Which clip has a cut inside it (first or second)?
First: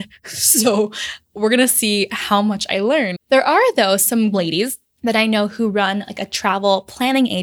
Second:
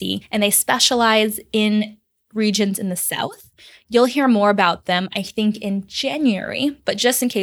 first